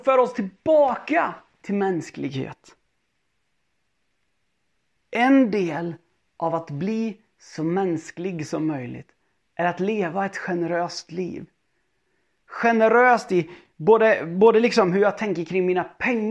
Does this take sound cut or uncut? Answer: uncut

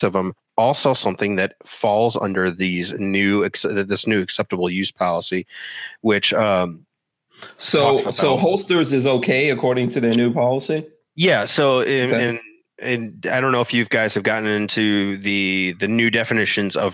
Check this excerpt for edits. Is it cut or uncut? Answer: uncut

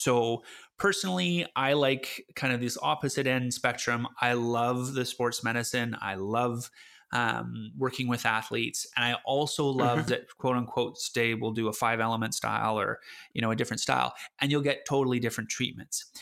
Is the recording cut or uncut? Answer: cut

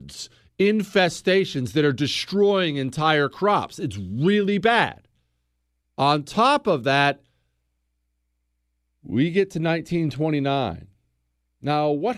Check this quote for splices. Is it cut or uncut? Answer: uncut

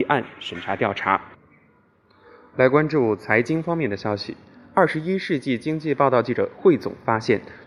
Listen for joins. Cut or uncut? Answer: uncut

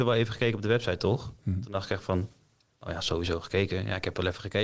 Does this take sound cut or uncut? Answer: uncut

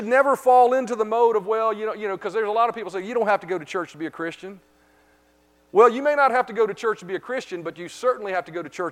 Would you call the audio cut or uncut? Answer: uncut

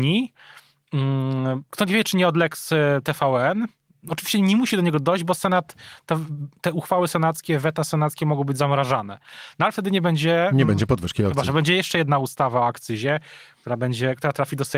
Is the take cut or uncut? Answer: cut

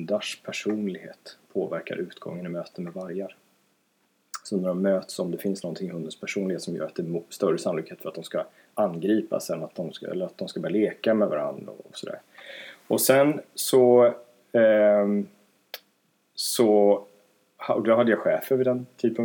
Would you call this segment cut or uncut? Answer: uncut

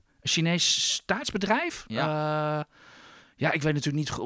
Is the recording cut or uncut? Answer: uncut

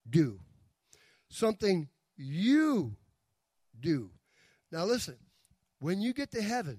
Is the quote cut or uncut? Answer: cut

